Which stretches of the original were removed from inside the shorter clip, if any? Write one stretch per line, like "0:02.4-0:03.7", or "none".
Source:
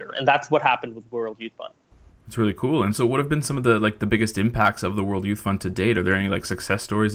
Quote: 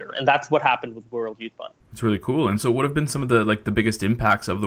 0:01.8-0:02.2